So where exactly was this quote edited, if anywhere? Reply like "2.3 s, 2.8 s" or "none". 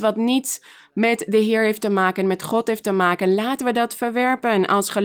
none